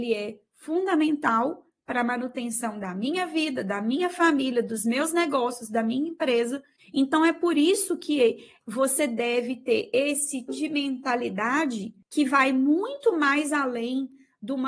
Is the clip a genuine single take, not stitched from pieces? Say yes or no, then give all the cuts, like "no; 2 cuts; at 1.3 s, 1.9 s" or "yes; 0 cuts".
no; 2 cuts; at 6.8 s, 10.5 s